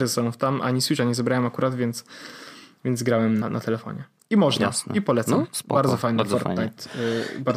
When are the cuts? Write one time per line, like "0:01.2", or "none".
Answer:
0:03.4